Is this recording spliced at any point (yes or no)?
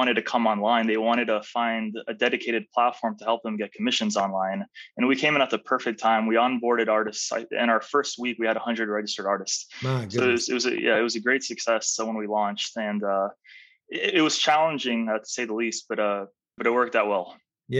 yes